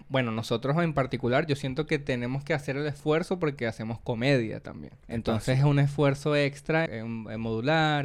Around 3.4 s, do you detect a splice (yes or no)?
no